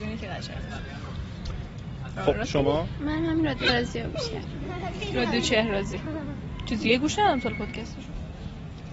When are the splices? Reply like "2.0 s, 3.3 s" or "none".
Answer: none